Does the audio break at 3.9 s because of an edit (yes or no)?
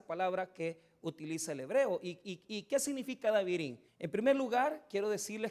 yes